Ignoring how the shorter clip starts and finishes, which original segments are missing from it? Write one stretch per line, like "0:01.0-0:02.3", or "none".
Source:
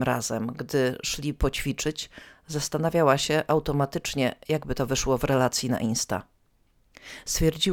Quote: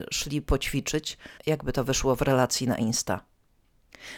0:02.3-0:04.4